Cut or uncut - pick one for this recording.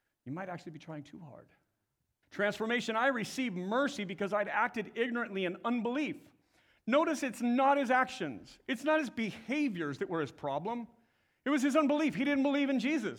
cut